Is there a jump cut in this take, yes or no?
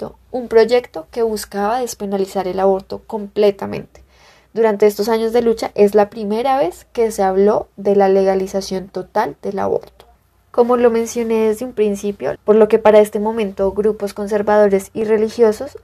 yes